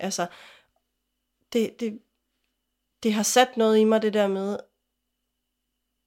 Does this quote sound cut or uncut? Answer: uncut